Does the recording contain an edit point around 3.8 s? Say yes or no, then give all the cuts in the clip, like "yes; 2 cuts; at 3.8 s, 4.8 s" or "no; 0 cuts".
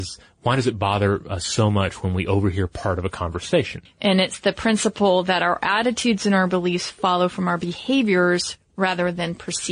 yes; 1 cut; at 3.8 s